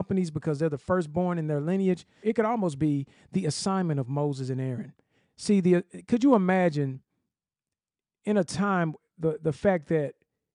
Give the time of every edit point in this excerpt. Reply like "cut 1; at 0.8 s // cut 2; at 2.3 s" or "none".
cut 1; at 2.2 s